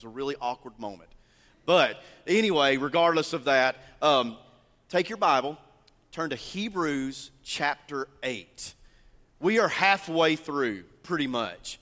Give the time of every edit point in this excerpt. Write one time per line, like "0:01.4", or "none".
none

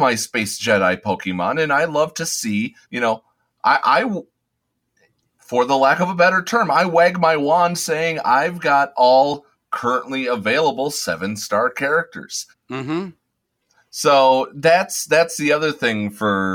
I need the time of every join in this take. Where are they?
0:02.8
0:12.5

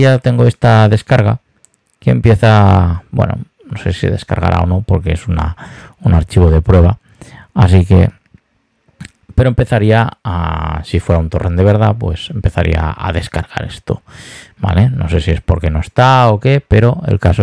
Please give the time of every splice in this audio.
none

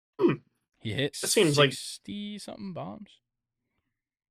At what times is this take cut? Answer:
0:01.1

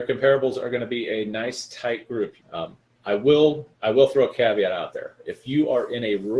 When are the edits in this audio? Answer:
0:02.4
0:03.7

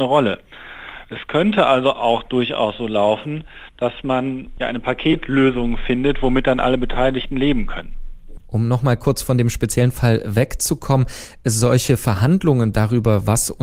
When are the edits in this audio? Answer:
none

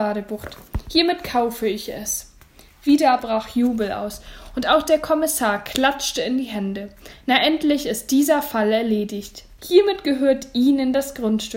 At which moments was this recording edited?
0:09.6

